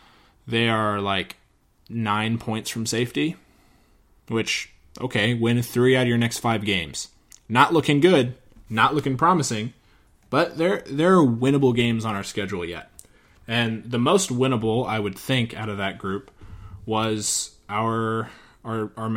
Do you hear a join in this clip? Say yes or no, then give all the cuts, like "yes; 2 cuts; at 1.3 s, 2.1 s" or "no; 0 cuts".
no; 0 cuts